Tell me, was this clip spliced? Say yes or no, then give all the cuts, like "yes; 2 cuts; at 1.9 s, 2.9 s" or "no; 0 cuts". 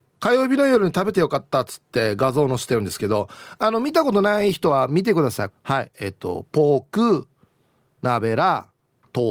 yes; 1 cut; at 5.5 s